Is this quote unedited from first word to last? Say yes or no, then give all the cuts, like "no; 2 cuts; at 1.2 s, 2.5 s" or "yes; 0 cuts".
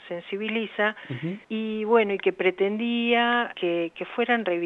no; 2 cuts; at 1.4 s, 3.5 s